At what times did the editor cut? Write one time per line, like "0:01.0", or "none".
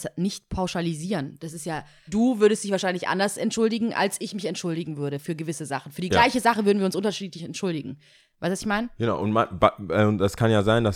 0:02.1